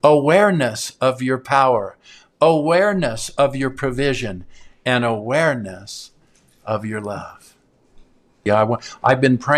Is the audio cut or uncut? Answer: cut